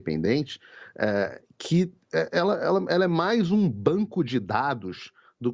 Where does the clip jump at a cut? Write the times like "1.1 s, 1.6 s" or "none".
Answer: none